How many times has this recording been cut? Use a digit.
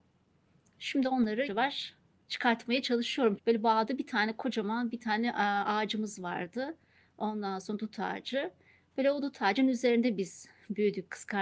2